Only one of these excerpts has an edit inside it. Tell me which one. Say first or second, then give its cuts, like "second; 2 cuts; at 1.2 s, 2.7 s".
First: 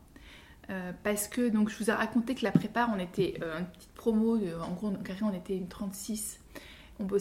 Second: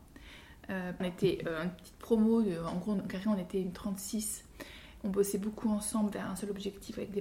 second; 1 cut; at 1.0 s